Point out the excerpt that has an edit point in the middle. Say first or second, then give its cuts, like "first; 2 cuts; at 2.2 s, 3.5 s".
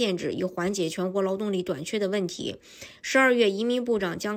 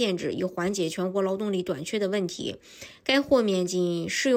first; 1 cut; at 3.0 s